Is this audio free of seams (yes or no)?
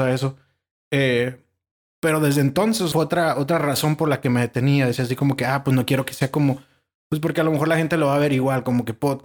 no